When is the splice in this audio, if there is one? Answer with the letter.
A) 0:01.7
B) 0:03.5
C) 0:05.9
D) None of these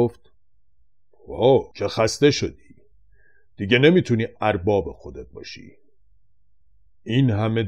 A